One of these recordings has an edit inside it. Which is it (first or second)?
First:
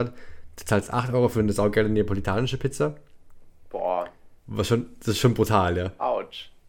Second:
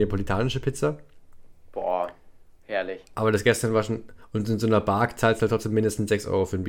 first